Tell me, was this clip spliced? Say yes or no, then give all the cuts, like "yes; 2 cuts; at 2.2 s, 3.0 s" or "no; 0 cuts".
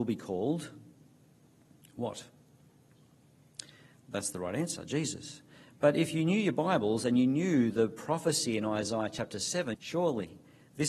yes; 1 cut; at 9.7 s